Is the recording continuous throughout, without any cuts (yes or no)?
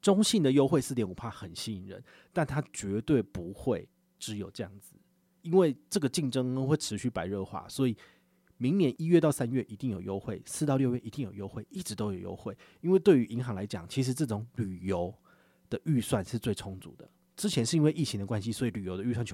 yes